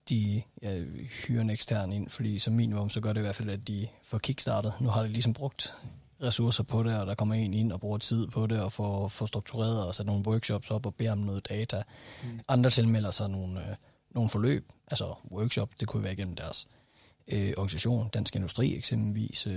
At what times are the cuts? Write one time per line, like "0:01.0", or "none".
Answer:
0:12.4